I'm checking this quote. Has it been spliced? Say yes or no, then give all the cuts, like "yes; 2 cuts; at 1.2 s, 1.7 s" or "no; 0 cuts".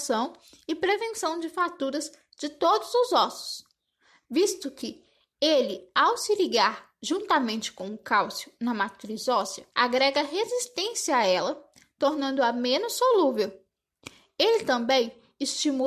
yes; 1 cut; at 9.7 s